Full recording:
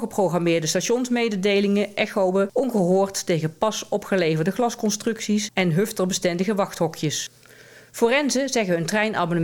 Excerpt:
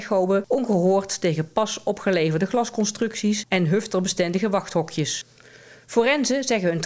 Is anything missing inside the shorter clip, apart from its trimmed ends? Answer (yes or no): no